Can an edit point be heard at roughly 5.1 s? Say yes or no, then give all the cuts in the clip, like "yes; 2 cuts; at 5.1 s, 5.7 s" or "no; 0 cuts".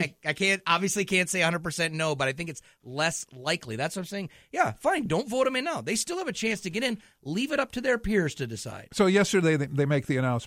no; 0 cuts